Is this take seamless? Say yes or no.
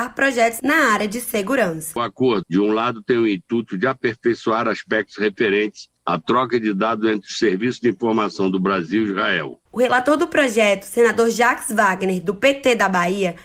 no